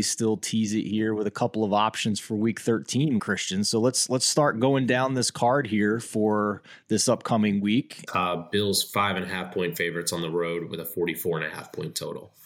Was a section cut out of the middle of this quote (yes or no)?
yes